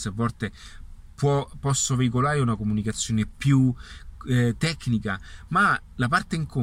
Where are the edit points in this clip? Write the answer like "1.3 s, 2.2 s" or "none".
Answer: none